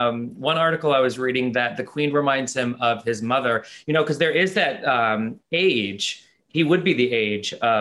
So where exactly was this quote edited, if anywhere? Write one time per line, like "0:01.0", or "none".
none